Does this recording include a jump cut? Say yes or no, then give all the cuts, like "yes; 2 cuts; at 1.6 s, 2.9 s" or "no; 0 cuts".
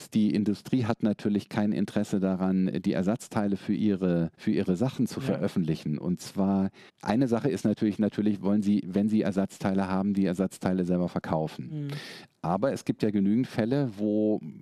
yes; 2 cuts; at 4.3 s, 6.9 s